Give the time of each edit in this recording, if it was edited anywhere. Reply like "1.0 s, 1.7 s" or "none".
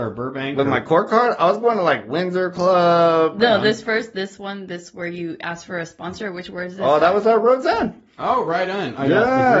none

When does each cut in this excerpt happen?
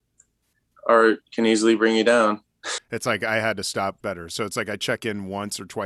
2.8 s, 4.0 s

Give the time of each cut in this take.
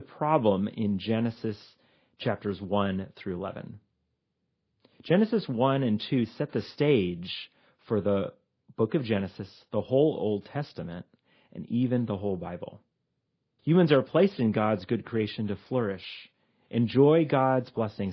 13.6 s

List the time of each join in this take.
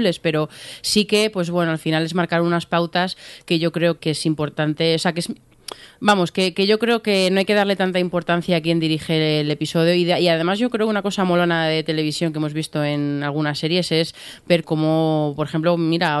4.0 s, 14.6 s

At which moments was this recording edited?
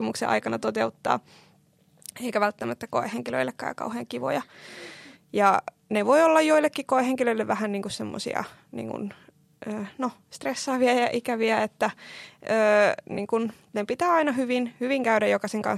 5.2 s

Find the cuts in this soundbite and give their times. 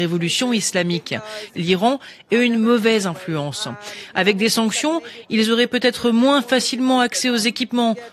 1.5 s

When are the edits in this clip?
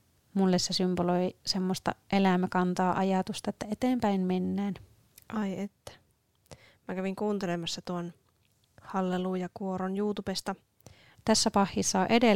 11.1 s

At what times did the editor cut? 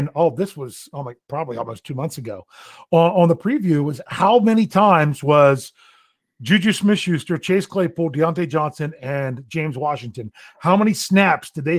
none

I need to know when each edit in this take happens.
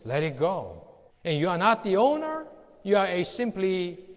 1.1 s

